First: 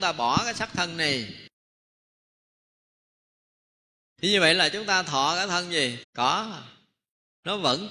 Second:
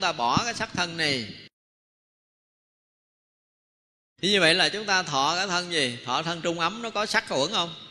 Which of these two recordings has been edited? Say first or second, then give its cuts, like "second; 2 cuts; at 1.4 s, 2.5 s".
first; 1 cut; at 6.0 s